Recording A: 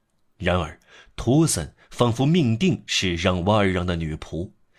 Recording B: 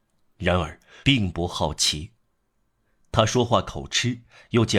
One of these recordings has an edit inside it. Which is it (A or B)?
B